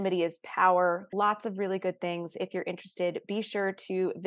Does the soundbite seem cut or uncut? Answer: cut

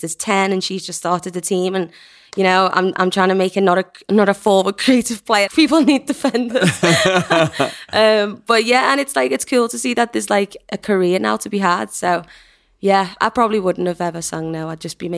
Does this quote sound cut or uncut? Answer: cut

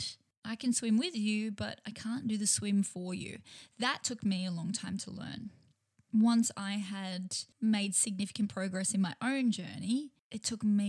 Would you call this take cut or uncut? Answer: uncut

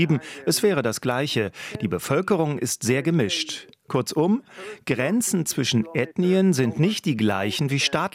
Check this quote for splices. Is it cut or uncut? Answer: uncut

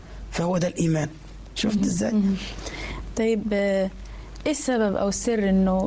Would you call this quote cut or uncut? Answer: uncut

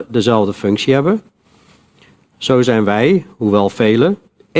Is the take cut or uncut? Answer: uncut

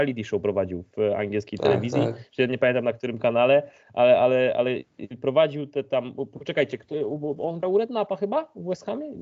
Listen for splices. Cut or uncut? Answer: uncut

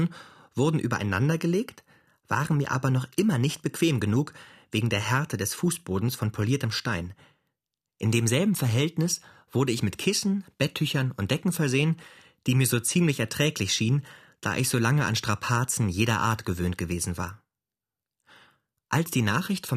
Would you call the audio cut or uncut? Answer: uncut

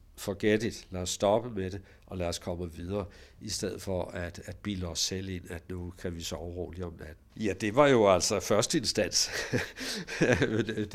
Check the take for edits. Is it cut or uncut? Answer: cut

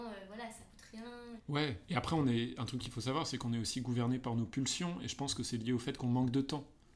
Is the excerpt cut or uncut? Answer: cut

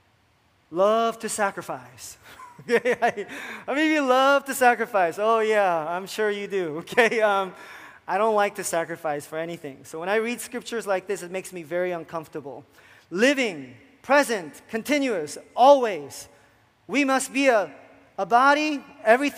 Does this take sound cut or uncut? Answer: uncut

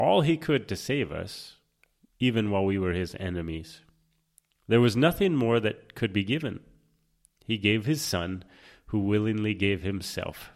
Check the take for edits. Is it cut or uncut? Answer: uncut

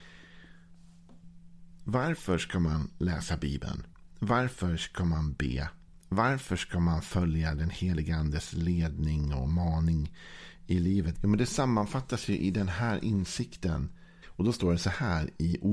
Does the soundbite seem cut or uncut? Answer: cut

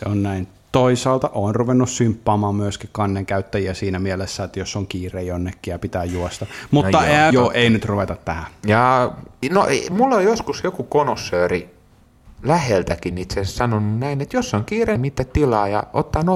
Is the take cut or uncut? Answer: cut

